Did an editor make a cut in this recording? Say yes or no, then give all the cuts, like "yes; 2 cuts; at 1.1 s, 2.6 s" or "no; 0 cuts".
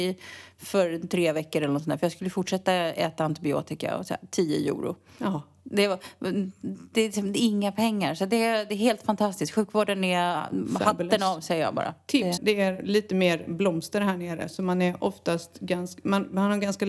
yes; 1 cut; at 12.4 s